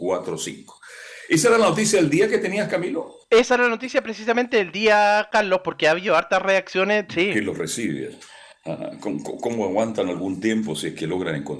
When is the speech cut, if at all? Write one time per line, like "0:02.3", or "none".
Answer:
0:07.1